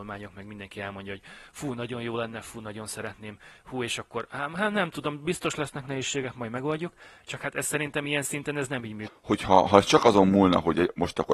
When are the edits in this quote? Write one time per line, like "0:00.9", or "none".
0:09.1